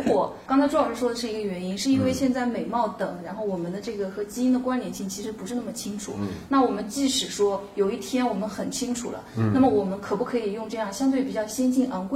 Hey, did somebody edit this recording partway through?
no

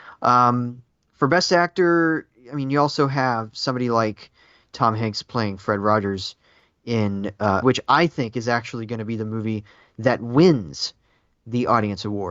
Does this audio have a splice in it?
yes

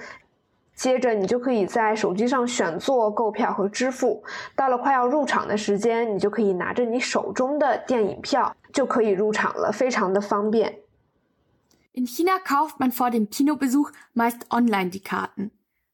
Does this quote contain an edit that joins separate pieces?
no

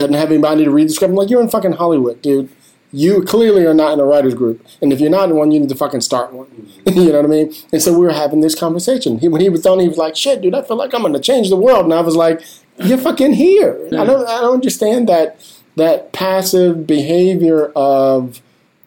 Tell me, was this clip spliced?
yes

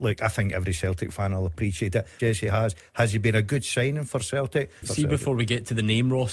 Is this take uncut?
no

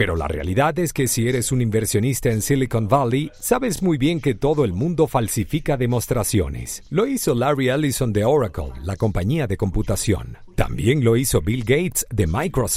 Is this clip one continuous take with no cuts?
yes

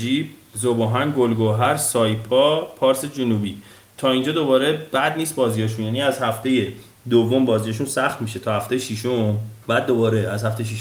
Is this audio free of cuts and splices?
no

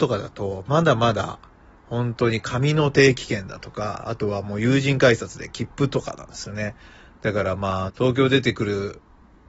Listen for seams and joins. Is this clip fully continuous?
no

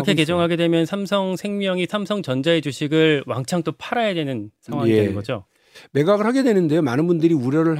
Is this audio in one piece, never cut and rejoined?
yes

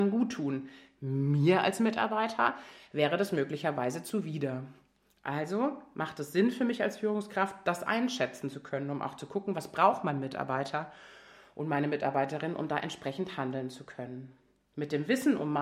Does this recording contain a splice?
no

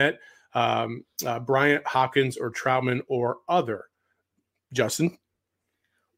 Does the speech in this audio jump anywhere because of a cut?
no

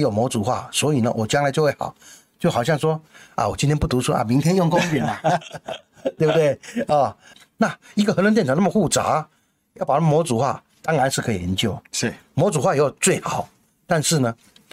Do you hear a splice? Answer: yes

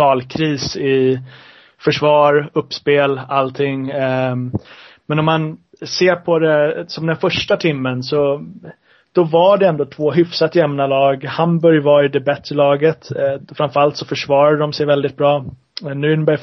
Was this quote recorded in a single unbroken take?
yes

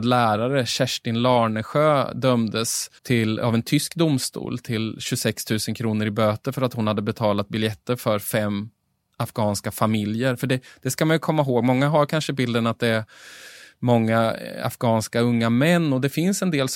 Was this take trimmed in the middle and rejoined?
yes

